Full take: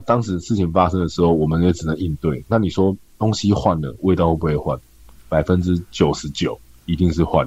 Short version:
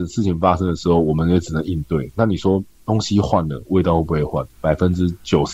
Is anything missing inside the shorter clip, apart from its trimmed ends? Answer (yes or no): yes